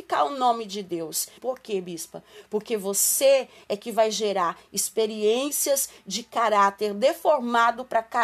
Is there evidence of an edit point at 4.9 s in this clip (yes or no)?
no